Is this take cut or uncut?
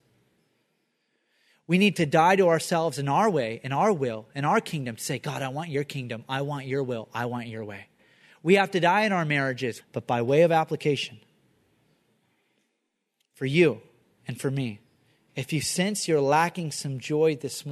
cut